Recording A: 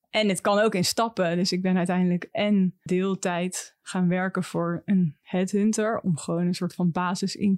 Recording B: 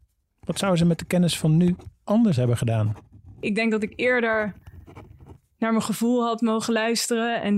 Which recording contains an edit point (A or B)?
A